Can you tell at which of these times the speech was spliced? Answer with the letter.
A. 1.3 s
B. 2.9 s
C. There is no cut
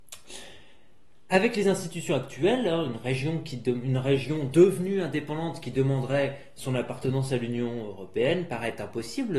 C